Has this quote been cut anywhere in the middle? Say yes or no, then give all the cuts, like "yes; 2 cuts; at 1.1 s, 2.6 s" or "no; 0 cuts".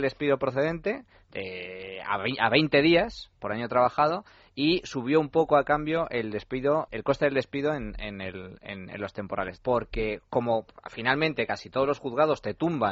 yes; 2 cuts; at 6.9 s, 9.6 s